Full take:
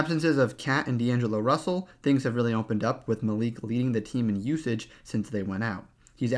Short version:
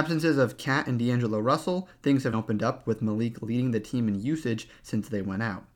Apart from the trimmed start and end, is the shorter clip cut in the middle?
yes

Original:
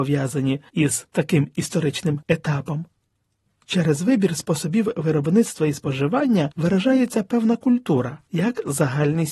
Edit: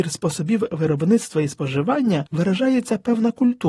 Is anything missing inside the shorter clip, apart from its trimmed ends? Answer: no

